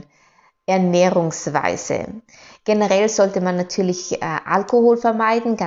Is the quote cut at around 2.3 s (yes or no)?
no